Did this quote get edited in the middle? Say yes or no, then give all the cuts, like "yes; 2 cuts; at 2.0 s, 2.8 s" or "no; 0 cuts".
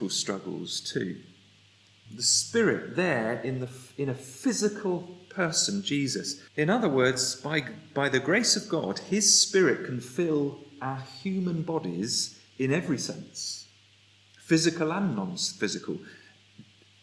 yes; 2 cuts; at 2.1 s, 6.5 s